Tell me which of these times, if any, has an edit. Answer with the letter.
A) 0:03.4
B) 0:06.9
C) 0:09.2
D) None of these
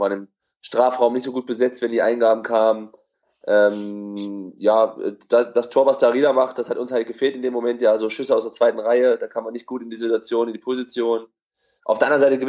D